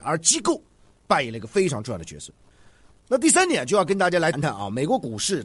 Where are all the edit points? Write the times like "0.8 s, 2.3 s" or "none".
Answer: 4.3 s